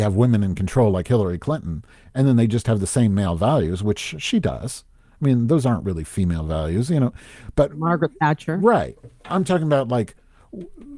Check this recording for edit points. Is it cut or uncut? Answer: uncut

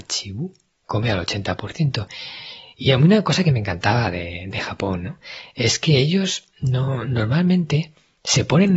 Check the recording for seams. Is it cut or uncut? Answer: uncut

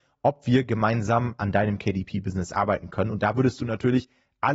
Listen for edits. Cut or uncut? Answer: uncut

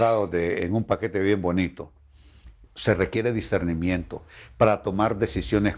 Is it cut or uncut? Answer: uncut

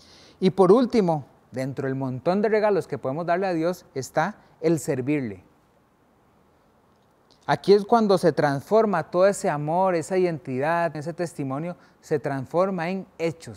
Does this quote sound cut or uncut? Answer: cut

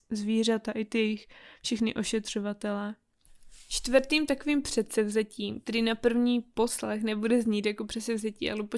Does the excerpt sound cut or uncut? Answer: uncut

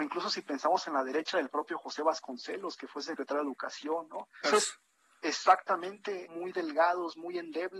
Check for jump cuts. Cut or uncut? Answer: cut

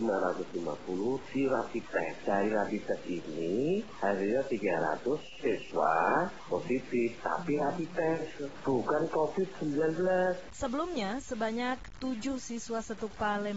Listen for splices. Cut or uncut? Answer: cut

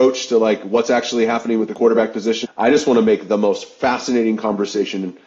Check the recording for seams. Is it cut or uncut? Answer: cut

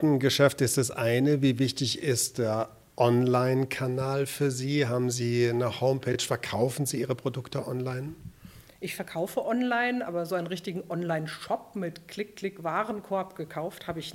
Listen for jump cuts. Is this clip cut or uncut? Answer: uncut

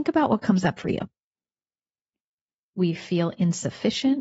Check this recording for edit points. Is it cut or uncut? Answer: cut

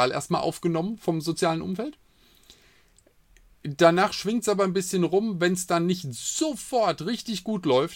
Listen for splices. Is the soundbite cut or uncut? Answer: uncut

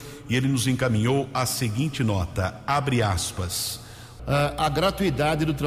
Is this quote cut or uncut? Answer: cut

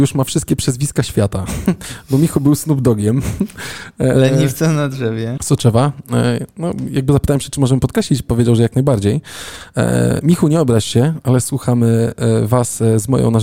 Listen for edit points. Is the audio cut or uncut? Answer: cut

